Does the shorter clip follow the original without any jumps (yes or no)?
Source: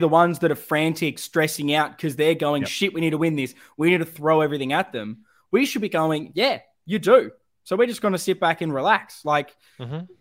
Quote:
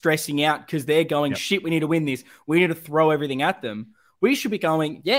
yes